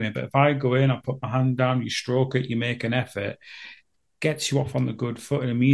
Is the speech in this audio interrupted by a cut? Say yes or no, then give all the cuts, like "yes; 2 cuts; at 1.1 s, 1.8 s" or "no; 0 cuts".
no; 0 cuts